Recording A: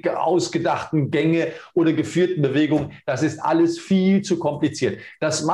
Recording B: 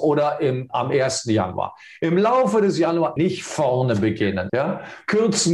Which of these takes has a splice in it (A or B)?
B